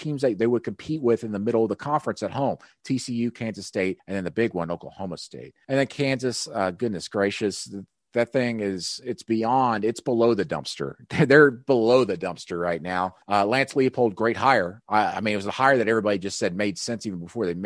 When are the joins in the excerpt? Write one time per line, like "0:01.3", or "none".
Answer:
none